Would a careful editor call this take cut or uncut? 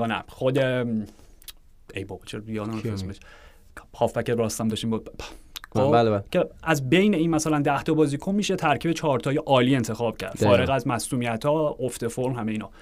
cut